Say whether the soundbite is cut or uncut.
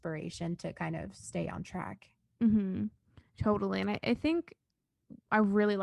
uncut